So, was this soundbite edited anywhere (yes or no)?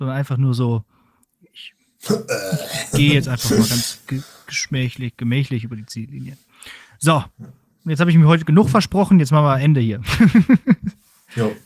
no